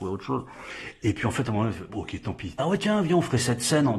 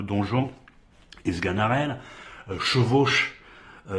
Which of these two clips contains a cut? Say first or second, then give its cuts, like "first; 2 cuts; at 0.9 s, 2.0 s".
first; 1 cut; at 2.6 s